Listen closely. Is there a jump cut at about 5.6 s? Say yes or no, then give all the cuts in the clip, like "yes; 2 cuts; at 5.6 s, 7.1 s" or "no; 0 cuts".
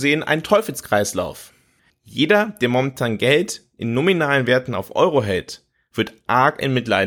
no; 1 cut; at 1.9 s